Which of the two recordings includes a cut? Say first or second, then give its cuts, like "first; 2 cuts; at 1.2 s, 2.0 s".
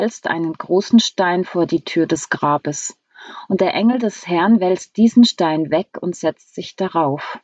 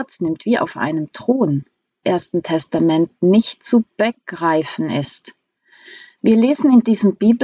second; 2 cuts; at 2.0 s, 6.2 s